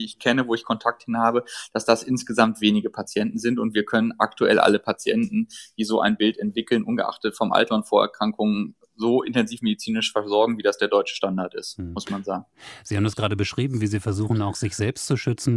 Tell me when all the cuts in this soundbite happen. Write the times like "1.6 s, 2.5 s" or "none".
none